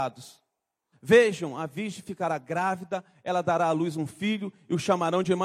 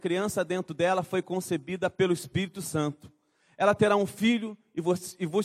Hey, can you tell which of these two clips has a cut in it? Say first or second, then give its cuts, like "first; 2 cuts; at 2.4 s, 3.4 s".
first; 1 cut; at 0.9 s